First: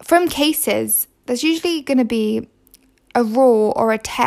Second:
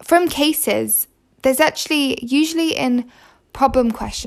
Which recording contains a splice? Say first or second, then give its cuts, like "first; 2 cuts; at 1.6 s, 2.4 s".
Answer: first; 1 cut; at 1.2 s